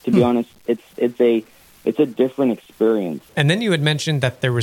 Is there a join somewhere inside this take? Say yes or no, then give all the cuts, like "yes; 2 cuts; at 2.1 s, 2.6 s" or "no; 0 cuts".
yes; 1 cut; at 3.3 s